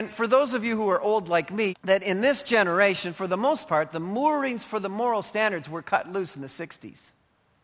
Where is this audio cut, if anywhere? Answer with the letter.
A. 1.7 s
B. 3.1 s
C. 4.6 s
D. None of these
A